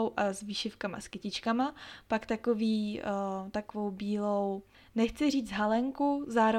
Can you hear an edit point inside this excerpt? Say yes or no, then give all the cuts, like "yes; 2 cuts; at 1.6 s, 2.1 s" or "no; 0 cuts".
no; 0 cuts